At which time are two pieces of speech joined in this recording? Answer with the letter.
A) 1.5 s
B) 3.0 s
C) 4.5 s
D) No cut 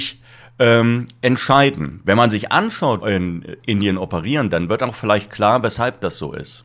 B